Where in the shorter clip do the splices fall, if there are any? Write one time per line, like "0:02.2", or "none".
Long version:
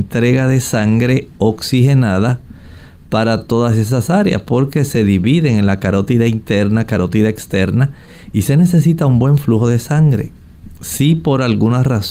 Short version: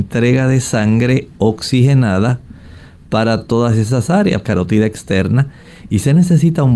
0:04.4